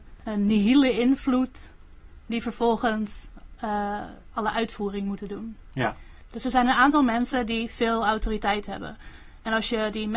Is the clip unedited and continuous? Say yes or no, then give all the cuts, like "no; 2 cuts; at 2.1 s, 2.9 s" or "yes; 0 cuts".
yes; 0 cuts